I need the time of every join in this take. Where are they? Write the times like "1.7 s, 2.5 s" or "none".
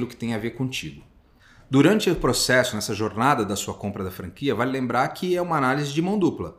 none